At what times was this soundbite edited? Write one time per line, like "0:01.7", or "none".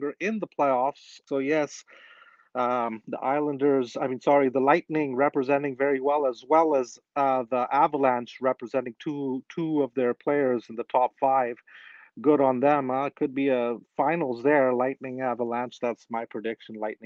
0:01.3